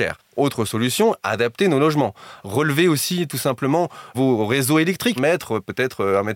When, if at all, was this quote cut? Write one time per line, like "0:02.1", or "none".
0:02.4
0:05.2